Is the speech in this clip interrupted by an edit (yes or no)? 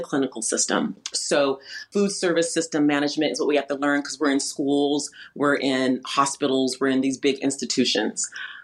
yes